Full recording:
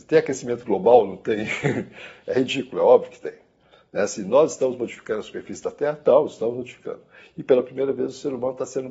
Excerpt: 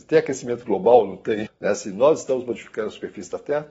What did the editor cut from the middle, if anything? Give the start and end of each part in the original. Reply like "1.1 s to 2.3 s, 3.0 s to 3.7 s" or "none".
1.4 s to 3.8 s